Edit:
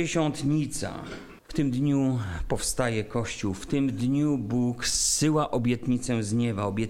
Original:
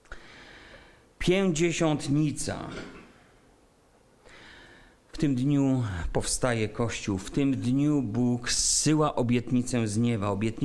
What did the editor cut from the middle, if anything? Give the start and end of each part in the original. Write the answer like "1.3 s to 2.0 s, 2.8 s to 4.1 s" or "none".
3.0 s to 5.0 s